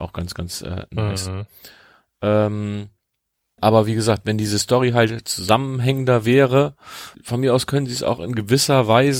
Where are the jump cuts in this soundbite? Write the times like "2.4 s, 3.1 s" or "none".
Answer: 3.6 s, 7.1 s